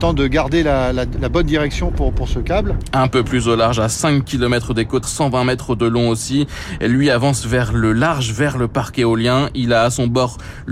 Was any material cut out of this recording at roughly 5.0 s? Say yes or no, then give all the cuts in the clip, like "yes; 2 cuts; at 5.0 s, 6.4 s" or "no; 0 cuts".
yes; 1 cut; at 5.0 s